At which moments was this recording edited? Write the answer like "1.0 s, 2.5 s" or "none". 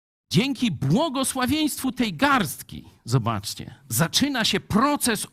none